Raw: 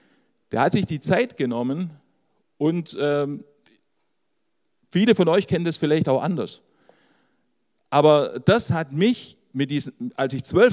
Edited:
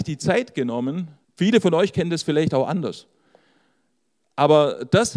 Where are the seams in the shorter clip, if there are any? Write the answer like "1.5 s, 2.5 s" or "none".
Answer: 1.2 s